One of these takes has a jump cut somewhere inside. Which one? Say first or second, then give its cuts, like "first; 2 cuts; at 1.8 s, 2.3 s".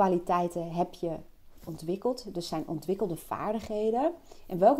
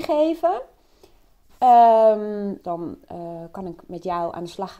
second; 1 cut; at 2.6 s